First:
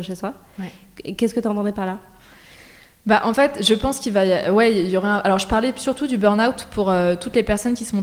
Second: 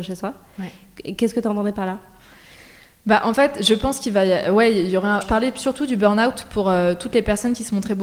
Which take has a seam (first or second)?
second